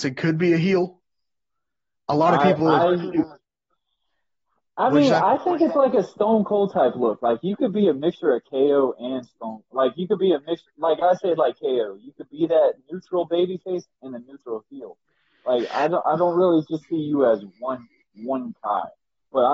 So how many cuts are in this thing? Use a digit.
0